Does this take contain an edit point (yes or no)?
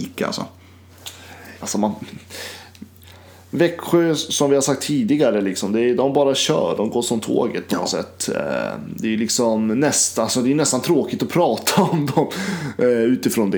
yes